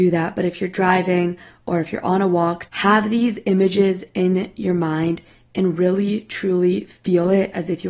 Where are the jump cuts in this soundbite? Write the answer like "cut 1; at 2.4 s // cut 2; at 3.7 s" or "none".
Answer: cut 1; at 2.7 s